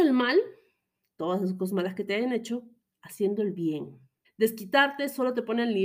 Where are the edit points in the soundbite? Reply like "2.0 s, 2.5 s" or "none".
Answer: 4.2 s